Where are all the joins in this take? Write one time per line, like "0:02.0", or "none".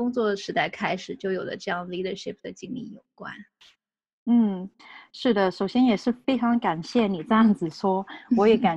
none